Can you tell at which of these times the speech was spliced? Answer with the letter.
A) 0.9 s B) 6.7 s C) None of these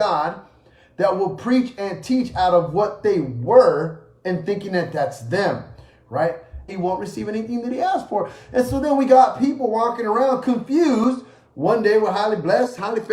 B